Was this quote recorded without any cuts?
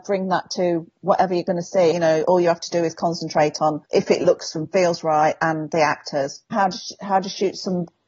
no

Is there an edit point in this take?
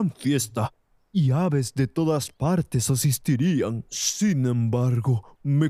yes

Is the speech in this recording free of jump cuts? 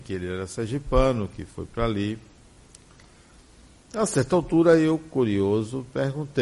yes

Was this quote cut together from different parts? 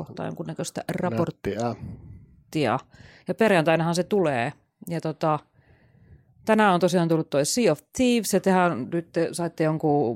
no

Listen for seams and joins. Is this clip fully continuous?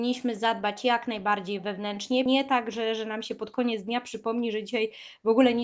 no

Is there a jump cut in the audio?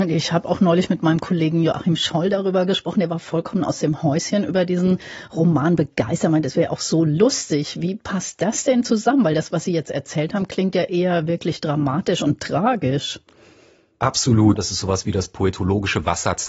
yes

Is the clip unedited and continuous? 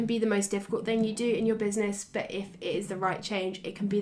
yes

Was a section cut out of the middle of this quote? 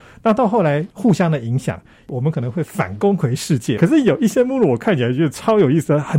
yes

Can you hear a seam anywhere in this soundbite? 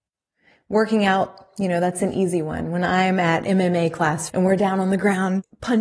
yes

